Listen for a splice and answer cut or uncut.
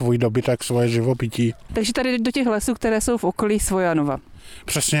uncut